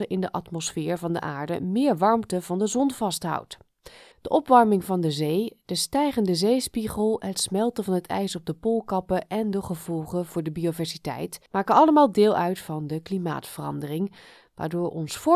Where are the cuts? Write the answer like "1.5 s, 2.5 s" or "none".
4.1 s, 11.5 s